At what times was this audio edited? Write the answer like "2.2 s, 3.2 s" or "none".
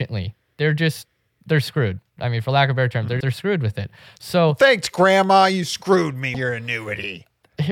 3.2 s, 6.3 s